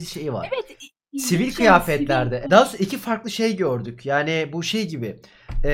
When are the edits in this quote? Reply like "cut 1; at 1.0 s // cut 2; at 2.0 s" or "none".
cut 1; at 2.4 s

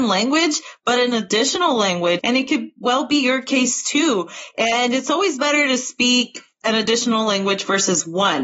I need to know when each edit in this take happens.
cut 1; at 2.2 s

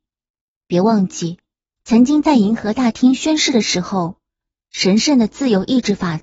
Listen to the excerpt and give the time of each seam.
cut 1; at 1.8 s

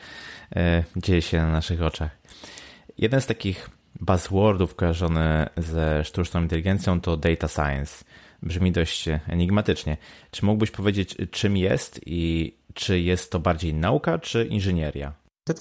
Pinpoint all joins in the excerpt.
none

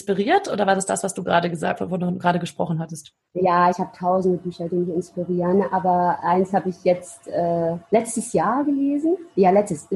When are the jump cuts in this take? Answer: none

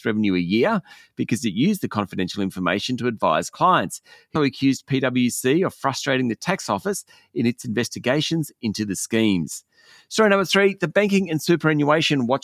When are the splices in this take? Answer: cut 1; at 4.4 s

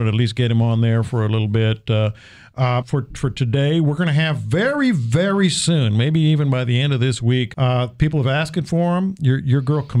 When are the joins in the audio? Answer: cut 1; at 2.8 s

